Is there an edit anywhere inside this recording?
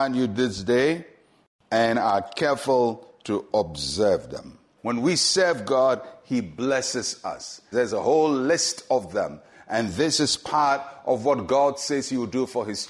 yes; 2 cuts; at 4.8 s, 7.7 s

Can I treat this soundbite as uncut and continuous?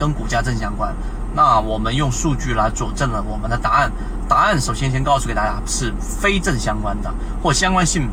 yes; 0 cuts

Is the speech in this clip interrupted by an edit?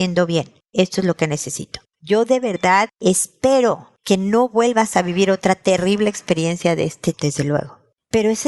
yes; 2 cuts; at 1.9 s, 7.1 s

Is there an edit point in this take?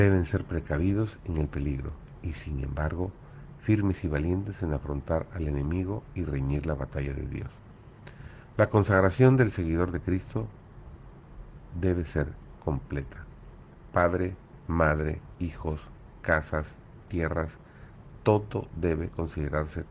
yes; 1 cut; at 15.3 s

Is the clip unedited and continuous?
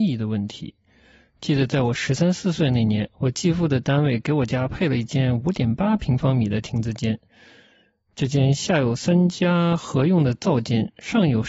yes; 0 cuts

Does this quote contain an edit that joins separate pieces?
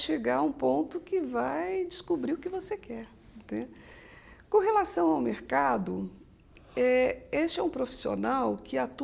no; 0 cuts

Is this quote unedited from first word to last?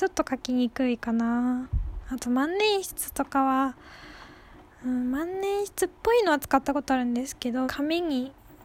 no; 1 cut; at 7.6 s

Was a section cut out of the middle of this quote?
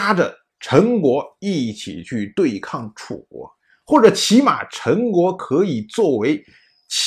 no; 0 cuts

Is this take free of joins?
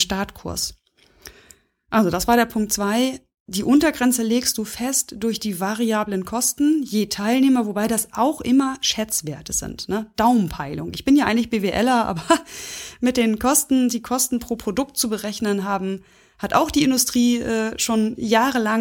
yes; 0 cuts

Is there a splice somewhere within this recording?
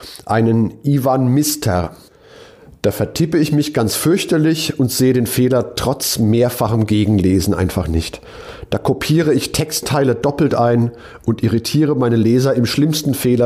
no; 0 cuts

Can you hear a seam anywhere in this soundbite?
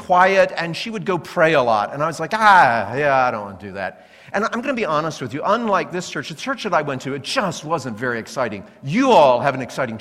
no; 0 cuts

